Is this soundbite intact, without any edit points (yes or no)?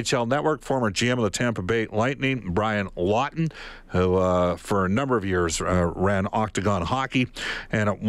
yes